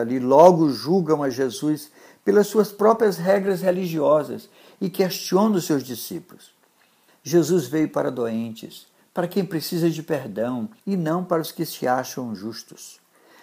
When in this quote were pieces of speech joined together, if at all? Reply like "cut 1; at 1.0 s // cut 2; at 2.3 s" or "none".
cut 1; at 7.1 s // cut 2; at 9.0 s // cut 3; at 10.8 s